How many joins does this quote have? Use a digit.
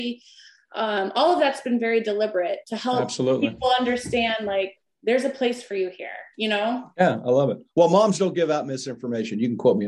0